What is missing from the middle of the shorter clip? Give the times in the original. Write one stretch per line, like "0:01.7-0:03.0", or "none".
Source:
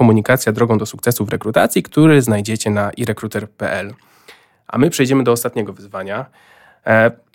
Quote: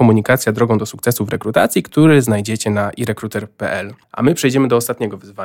0:04.0-0:04.6